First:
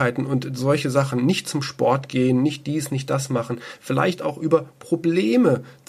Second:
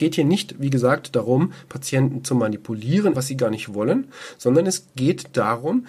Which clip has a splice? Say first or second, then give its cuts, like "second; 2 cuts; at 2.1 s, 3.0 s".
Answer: second; 1 cut; at 3.1 s